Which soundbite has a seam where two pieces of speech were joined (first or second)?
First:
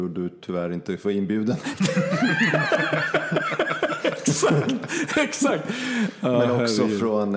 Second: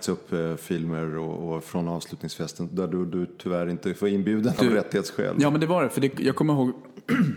second